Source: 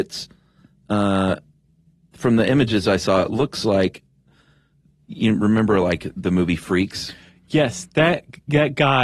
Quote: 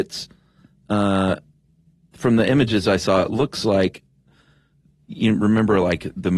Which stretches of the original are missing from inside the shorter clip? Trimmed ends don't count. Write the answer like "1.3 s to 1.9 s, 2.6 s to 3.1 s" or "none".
none